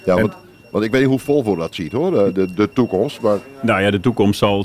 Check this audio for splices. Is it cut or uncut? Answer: uncut